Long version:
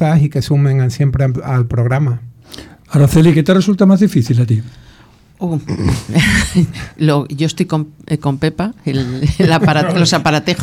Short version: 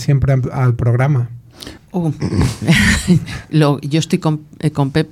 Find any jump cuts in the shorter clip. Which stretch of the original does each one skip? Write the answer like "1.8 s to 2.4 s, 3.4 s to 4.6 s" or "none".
2.7 s to 5.2 s